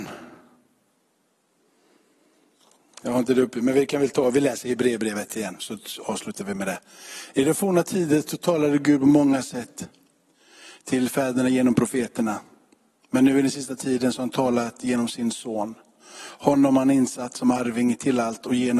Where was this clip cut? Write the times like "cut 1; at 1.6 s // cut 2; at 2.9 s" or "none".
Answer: cut 1; at 5.6 s